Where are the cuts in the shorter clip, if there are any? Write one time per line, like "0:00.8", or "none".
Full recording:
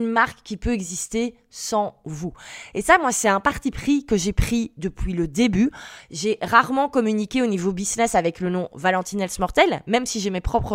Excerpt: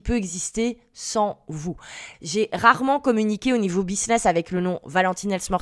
0:02.1

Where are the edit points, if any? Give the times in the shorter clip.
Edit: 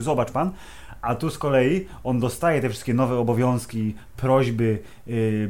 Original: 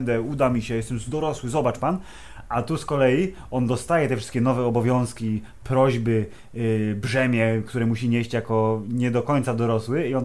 none

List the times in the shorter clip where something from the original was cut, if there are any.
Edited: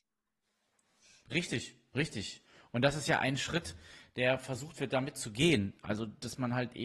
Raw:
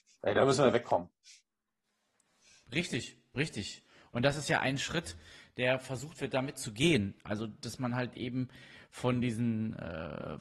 none

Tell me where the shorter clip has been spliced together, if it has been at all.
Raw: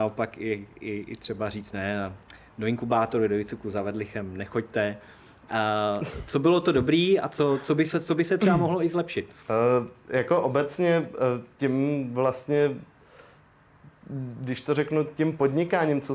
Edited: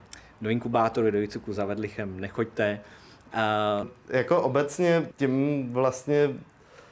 0:03.8
0:05.1

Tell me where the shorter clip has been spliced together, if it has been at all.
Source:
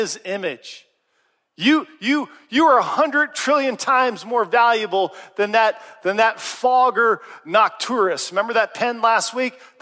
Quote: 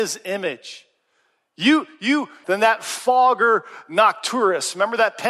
0:02.4

